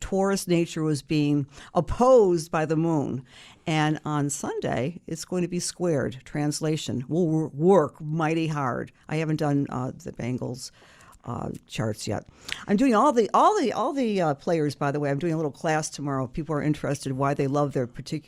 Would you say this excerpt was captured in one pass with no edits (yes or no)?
yes